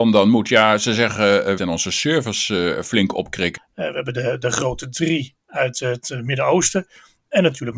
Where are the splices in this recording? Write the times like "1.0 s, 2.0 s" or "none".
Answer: 1.6 s, 3.6 s